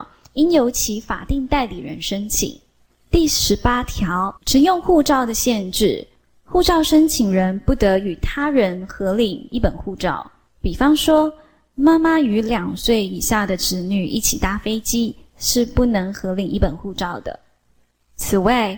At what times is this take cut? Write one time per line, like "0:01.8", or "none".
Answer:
0:02.9
0:04.4